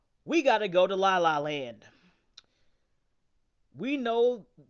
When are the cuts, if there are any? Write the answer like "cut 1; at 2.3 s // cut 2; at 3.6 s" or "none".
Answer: none